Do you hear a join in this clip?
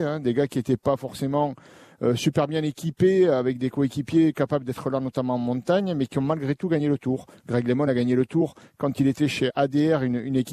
no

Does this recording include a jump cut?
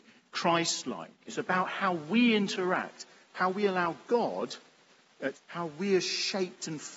yes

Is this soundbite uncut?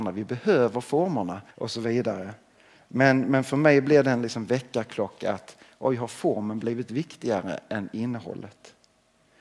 no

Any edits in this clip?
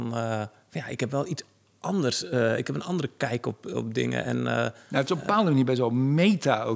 no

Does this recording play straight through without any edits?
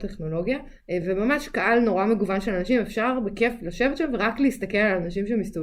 yes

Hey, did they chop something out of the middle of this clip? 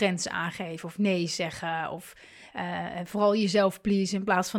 no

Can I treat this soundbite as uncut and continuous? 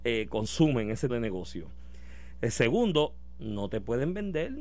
no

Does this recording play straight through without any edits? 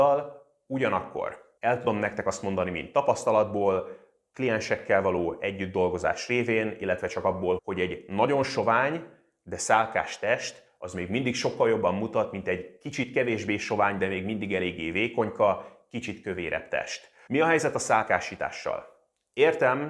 no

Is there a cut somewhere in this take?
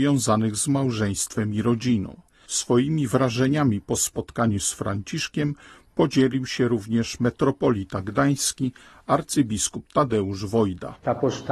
no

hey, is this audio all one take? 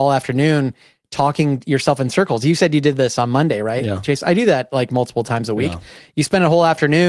yes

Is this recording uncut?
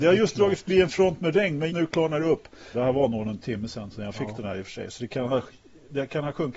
no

